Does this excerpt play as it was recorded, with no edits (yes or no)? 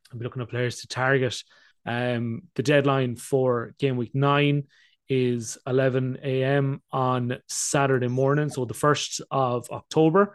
no